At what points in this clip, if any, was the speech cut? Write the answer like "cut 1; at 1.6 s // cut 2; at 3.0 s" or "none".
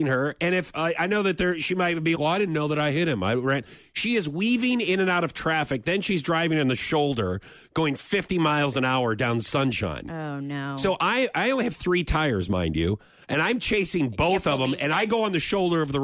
cut 1; at 2.1 s